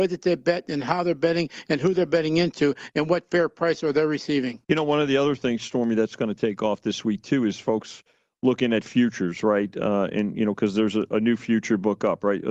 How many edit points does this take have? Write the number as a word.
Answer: one